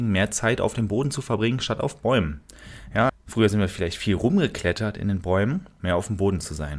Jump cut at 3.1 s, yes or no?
yes